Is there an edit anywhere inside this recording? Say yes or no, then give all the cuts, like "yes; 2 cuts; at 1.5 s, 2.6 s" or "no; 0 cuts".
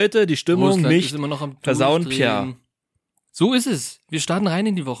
no; 0 cuts